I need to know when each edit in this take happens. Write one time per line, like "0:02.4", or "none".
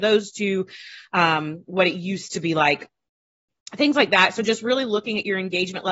none